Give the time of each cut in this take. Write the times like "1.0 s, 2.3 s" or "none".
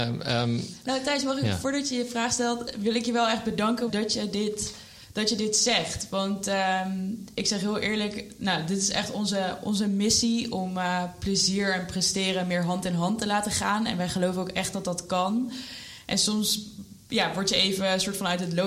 3.9 s